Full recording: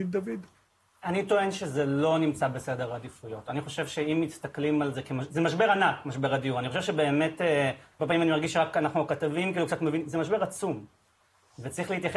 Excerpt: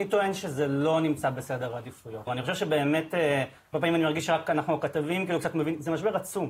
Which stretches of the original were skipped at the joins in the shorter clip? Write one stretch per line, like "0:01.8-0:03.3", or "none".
0:03.4-0:06.5